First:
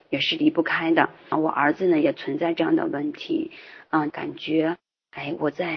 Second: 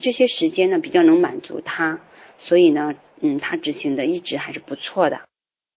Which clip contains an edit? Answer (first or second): first